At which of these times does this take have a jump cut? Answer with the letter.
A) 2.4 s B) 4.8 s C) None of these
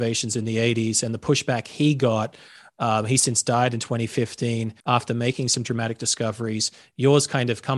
B